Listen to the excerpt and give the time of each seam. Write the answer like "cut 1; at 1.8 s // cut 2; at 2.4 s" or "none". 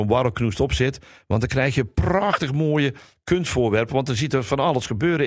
none